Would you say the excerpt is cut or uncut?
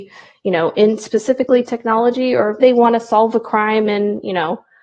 cut